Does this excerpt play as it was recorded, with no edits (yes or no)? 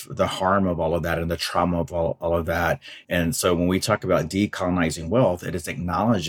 no